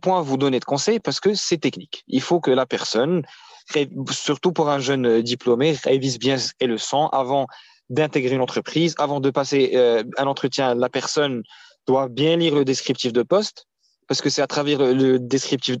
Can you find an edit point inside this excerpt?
no; 0 cuts

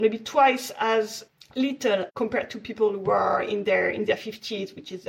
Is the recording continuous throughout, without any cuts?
yes; 0 cuts

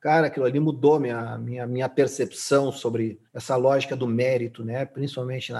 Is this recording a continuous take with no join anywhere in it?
no; 1 cut; at 3.3 s

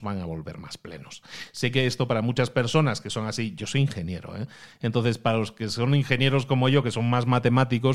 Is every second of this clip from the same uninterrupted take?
yes; 0 cuts

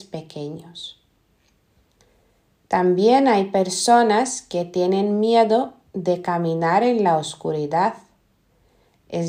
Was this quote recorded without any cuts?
yes; 0 cuts

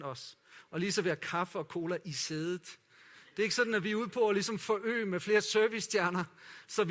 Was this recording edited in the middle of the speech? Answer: no; 0 cuts

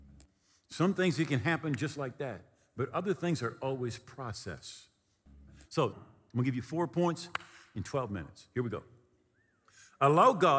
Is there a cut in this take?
yes; 1 cut; at 5.9 s

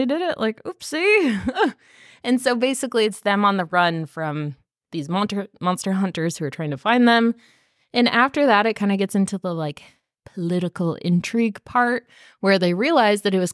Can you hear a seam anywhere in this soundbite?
no; 0 cuts

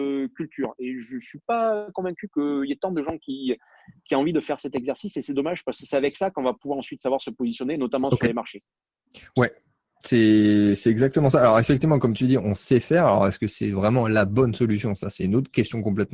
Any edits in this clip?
no; 0 cuts

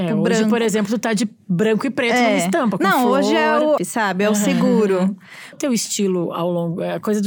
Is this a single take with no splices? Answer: no; 2 cuts; at 3.8 s, 5.5 s

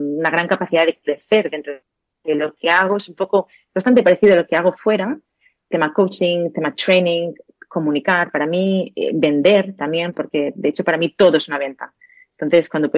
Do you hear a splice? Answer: no; 0 cuts

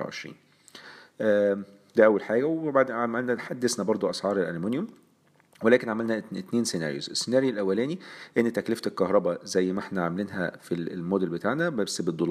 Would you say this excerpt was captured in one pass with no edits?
yes; 0 cuts

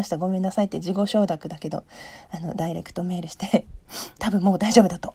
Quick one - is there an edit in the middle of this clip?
yes; 1 cut; at 4.2 s

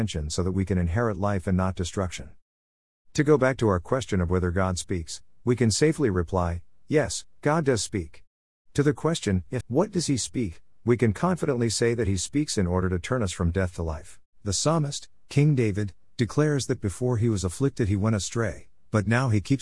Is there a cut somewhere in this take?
yes; 2 cuts; at 9.6 s, 14.3 s

